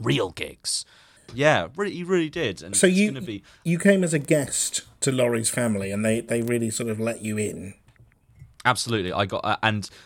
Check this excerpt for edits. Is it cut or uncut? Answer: cut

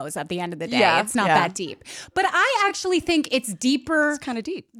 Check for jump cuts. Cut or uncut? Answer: uncut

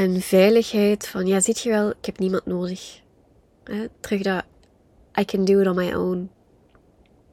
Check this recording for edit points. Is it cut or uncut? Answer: cut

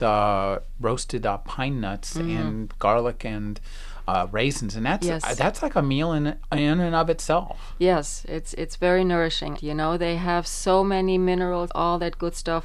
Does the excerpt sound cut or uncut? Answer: cut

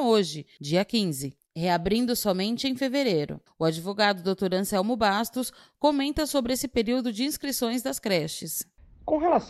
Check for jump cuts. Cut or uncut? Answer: uncut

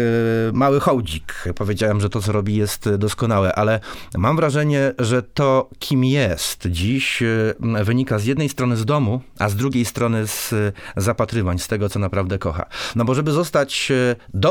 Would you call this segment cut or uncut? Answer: uncut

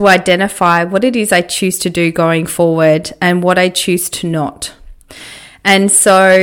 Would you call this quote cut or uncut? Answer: uncut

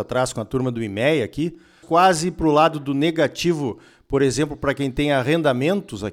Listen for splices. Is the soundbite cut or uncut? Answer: cut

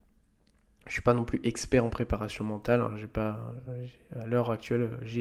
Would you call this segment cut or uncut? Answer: uncut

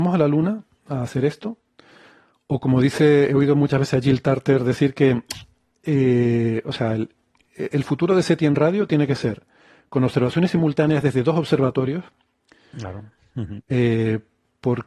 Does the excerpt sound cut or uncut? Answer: uncut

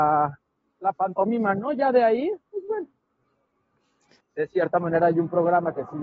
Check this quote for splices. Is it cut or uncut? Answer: cut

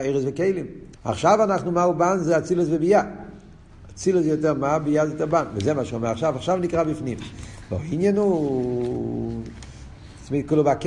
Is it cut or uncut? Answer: cut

